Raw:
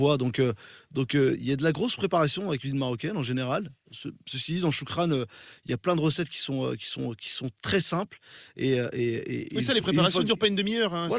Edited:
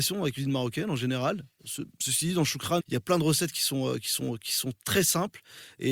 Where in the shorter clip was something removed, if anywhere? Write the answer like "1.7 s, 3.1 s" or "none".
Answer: 2.8 s